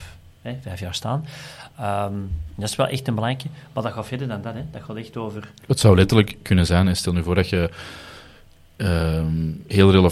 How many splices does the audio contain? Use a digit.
0